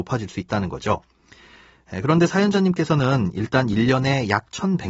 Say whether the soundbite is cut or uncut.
uncut